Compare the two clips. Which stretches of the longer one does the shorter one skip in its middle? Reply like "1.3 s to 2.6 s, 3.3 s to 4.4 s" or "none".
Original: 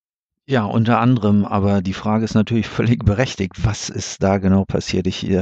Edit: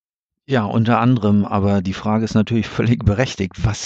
none

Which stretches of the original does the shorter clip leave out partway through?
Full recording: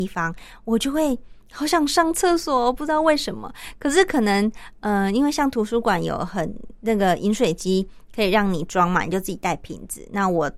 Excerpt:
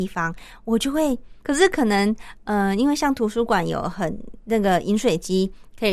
1.4 s to 3.8 s

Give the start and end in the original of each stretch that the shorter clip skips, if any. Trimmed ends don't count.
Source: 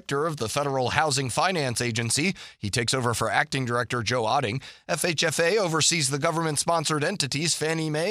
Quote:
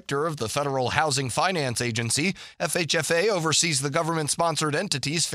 2.5 s to 4.8 s

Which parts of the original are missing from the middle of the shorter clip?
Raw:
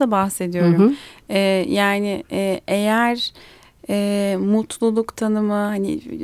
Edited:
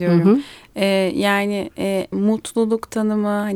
2.7 s to 4.4 s

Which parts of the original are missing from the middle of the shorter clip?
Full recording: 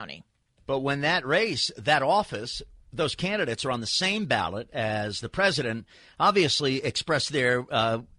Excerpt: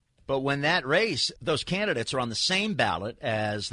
1.7 s to 2.9 s

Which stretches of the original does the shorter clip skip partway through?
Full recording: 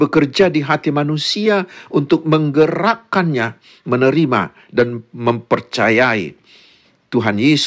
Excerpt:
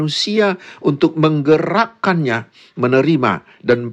none

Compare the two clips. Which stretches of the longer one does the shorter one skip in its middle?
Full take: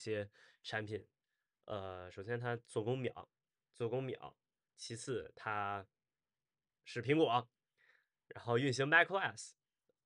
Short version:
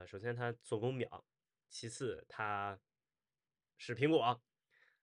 3.6 s to 4.7 s

